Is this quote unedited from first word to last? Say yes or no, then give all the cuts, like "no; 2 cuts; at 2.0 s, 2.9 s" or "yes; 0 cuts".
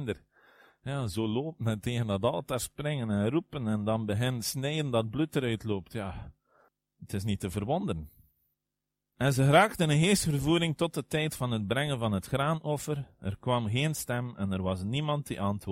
yes; 0 cuts